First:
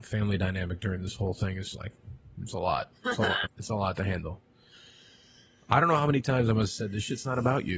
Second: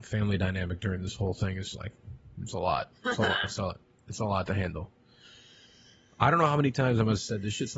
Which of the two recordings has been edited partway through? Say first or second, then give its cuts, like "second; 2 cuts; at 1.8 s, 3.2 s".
first; 1 cut; at 3.5 s